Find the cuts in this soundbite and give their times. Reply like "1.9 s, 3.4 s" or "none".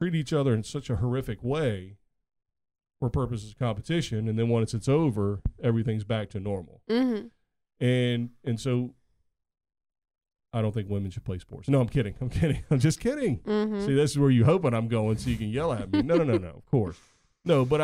10.4 s